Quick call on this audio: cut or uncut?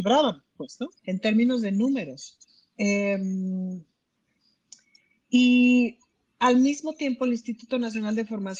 cut